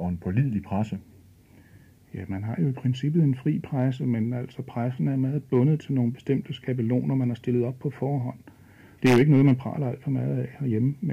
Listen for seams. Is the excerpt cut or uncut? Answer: cut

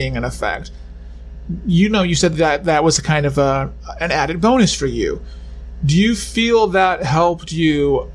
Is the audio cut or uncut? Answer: uncut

